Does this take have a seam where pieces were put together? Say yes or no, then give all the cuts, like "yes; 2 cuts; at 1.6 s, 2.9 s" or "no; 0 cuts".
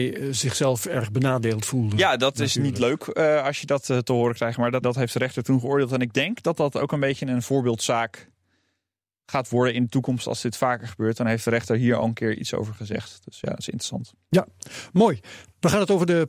yes; 1 cut; at 4.8 s